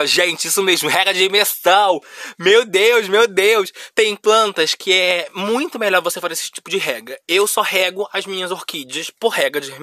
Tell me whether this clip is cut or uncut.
uncut